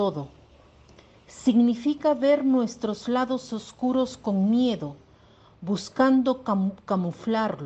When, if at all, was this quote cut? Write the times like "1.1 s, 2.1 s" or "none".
none